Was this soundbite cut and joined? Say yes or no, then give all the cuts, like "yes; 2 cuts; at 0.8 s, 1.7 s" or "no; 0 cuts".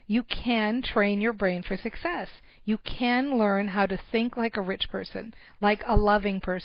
yes; 1 cut; at 5.5 s